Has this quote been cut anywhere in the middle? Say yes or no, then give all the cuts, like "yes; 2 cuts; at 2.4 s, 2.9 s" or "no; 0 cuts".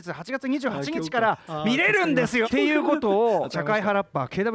yes; 2 cuts; at 2.4 s, 3.5 s